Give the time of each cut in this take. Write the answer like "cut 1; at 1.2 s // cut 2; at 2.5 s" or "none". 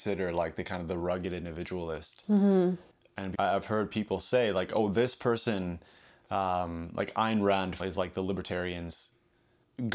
cut 1; at 3.3 s // cut 2; at 7.8 s